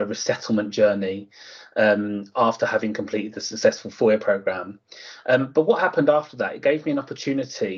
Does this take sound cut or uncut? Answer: uncut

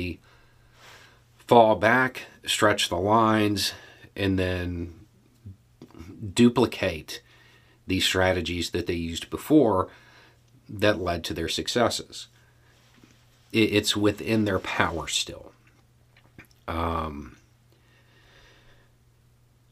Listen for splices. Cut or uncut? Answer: uncut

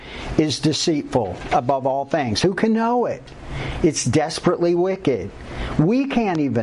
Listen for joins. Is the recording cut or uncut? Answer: uncut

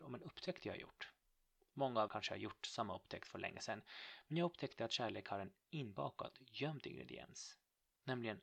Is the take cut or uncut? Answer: cut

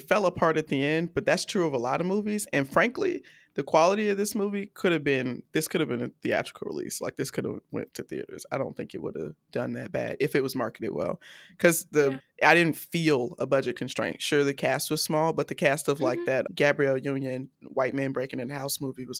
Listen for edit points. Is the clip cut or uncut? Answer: cut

